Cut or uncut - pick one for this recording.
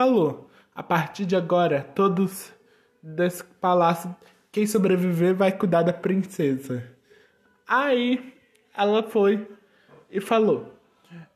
uncut